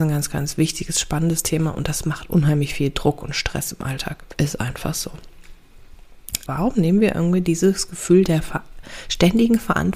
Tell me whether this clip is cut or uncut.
cut